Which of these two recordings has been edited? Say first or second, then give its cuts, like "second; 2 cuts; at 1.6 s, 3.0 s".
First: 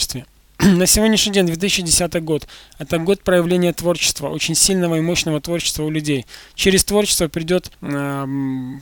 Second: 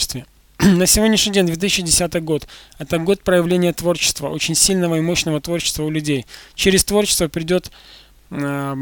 first; 1 cut; at 7.7 s